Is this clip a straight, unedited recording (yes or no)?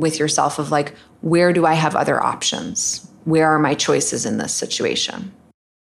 yes